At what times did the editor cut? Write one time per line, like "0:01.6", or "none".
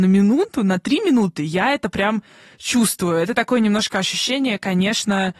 none